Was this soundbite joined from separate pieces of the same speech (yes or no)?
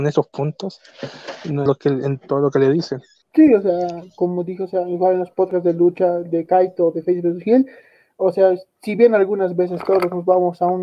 yes